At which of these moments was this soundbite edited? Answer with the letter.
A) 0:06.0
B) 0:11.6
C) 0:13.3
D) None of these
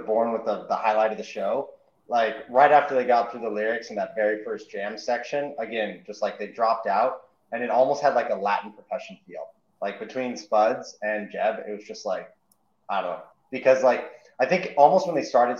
C